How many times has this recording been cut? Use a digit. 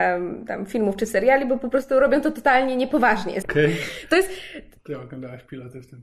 2